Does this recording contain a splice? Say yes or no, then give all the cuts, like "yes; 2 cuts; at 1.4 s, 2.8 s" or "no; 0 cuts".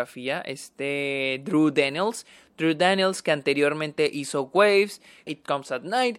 yes; 1 cut; at 5.3 s